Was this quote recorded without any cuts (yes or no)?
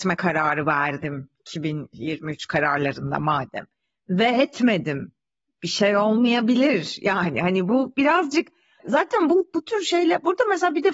yes